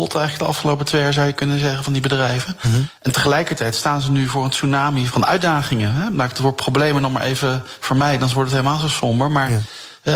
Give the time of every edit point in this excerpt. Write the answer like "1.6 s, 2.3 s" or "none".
5.1 s